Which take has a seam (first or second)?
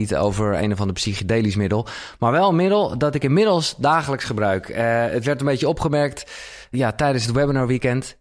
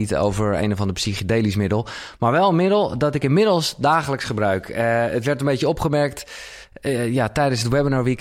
first